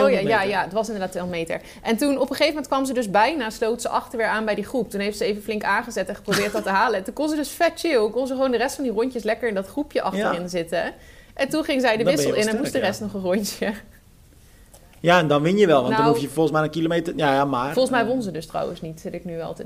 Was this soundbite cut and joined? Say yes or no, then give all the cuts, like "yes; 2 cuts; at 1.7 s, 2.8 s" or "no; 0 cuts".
no; 0 cuts